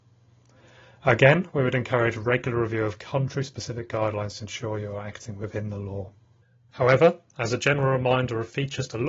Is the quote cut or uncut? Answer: cut